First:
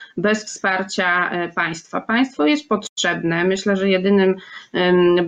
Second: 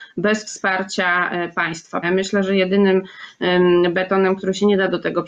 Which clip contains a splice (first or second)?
second